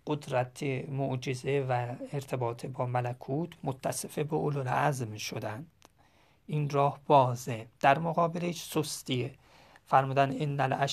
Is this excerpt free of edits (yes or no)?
no